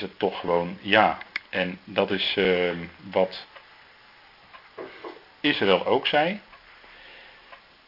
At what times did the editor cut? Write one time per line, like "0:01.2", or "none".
none